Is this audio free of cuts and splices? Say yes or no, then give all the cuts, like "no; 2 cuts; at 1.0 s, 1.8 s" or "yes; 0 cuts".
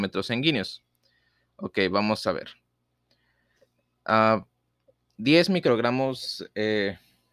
yes; 0 cuts